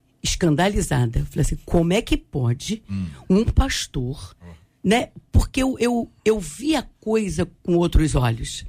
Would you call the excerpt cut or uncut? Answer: uncut